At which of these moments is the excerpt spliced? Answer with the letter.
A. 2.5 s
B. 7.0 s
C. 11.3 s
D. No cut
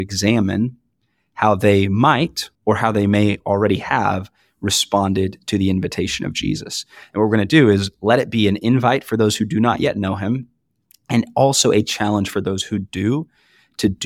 A